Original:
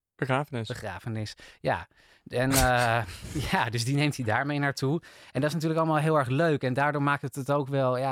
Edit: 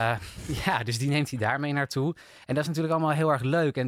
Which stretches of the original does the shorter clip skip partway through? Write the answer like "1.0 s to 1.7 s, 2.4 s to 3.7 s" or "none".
none